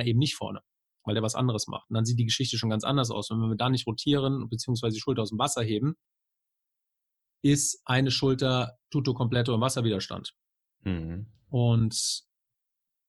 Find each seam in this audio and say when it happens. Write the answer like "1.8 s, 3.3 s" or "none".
none